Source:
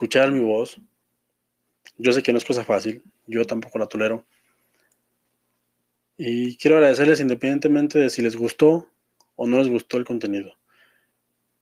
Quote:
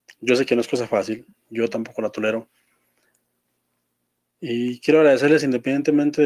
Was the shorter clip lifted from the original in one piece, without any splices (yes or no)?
yes